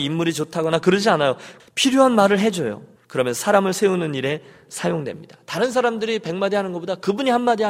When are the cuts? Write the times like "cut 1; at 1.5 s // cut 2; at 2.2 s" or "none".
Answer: cut 1; at 1.6 s // cut 2; at 3.0 s